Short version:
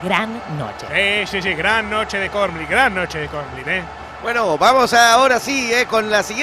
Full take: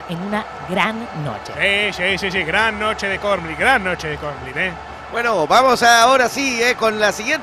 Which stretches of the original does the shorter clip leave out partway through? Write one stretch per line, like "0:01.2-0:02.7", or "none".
0:02.0-0:02.2